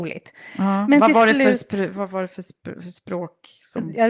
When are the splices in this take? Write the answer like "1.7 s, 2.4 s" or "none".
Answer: none